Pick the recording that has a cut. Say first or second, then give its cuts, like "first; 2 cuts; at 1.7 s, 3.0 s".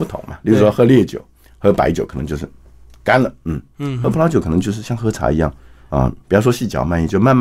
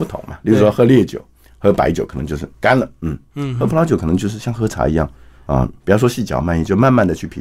second; 1 cut; at 2.5 s